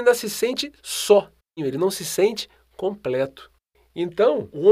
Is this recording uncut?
no; 1 cut; at 1.6 s

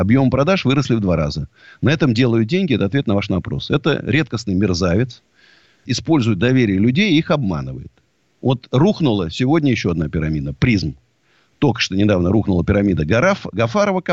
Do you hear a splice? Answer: yes; 1 cut; at 5.9 s

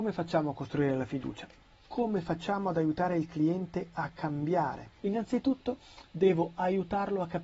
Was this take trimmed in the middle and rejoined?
yes; 1 cut; at 5.0 s

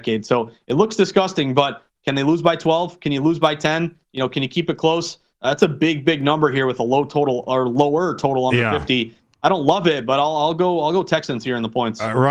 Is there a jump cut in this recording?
no; 0 cuts

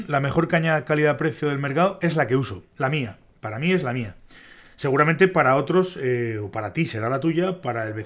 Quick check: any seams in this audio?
no; 0 cuts

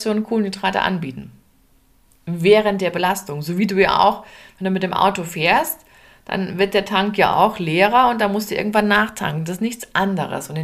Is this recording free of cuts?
yes; 0 cuts

